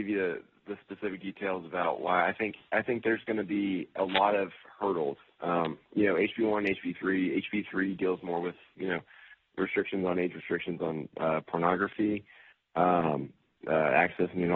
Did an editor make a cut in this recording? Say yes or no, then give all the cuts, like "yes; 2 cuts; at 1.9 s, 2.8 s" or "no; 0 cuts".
no; 0 cuts